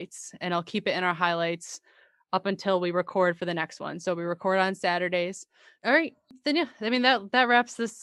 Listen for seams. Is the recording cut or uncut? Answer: cut